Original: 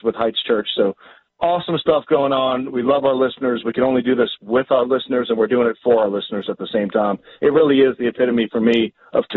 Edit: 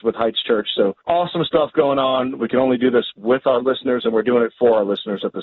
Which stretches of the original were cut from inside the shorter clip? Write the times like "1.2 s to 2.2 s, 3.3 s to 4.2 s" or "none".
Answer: 1.0 s to 1.3 s, 2.7 s to 3.6 s